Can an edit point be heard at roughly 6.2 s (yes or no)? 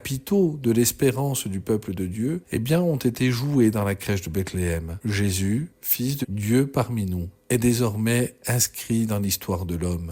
yes